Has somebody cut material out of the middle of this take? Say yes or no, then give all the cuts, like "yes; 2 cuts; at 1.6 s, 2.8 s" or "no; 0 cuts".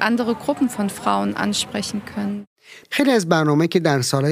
yes; 1 cut; at 2.8 s